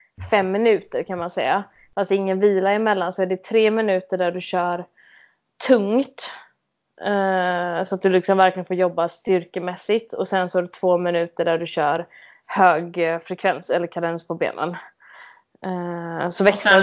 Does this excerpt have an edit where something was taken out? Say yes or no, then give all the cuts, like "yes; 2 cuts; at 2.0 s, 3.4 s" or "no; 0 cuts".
no; 0 cuts